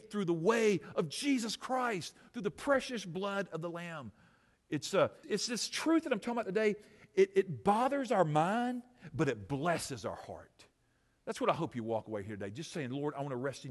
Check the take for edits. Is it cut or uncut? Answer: cut